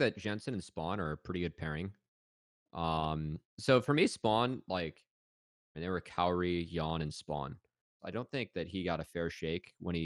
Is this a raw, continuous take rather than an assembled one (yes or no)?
no